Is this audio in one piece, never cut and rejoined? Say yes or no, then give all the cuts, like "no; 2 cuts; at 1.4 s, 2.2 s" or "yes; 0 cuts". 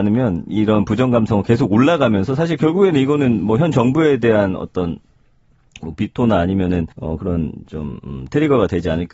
no; 1 cut; at 6.9 s